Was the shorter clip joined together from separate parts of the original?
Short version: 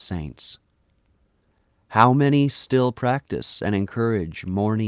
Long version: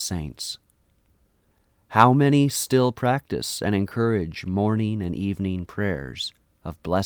no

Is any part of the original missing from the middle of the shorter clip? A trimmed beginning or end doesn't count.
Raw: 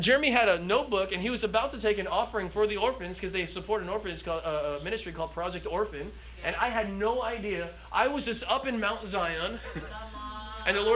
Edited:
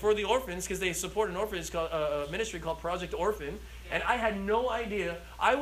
no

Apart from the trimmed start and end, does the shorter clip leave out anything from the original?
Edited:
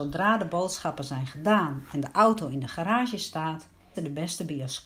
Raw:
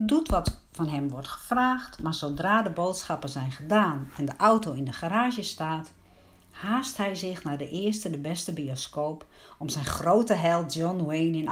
yes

